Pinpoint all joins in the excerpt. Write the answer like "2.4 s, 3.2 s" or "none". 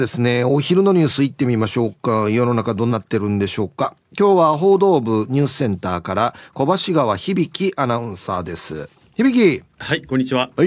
2.9 s

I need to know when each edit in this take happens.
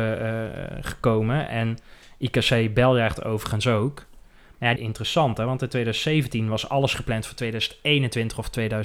4.8 s

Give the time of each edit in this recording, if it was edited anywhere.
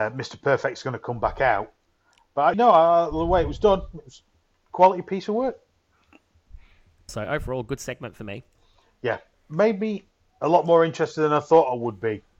2.5 s, 7.1 s, 9.3 s

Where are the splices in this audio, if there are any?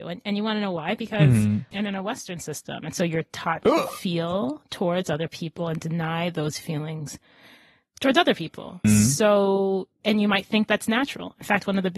1.7 s, 8.8 s

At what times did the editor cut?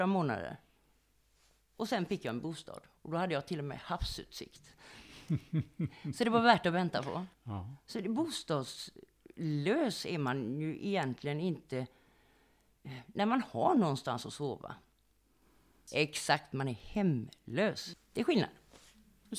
7.3 s, 15.9 s, 17.9 s

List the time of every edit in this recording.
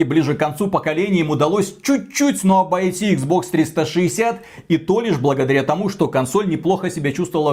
none

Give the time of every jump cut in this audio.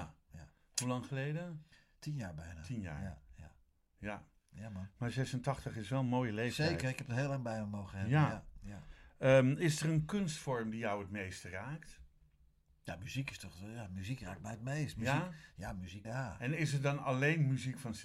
16.0 s

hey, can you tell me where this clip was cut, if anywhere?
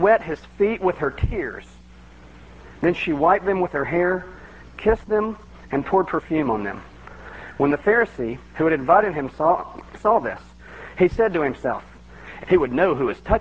9.9 s, 12.4 s

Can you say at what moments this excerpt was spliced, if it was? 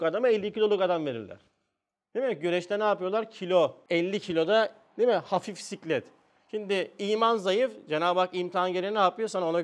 3.9 s

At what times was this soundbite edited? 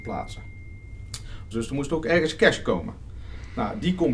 1.5 s

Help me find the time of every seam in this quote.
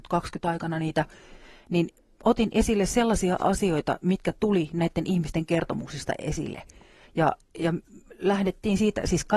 none

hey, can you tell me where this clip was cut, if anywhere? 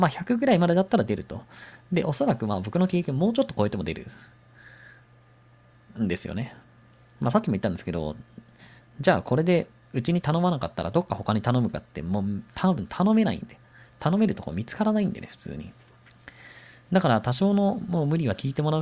none

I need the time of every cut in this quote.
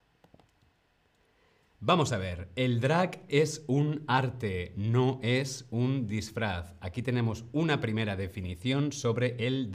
none

